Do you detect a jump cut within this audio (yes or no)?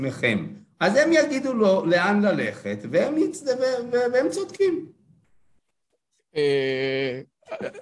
no